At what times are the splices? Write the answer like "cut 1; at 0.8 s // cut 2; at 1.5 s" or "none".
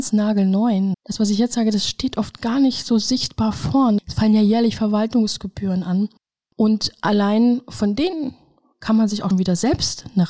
cut 1; at 0.9 s // cut 2; at 4.0 s // cut 3; at 9.3 s